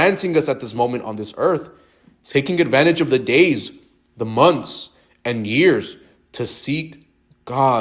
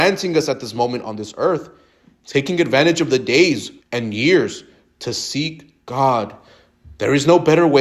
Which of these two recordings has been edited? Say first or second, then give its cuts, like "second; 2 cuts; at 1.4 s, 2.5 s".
second; 2 cuts; at 3.8 s, 5.8 s